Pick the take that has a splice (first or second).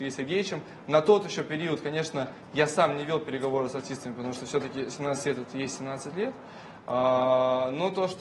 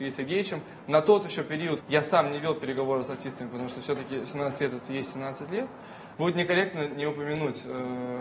second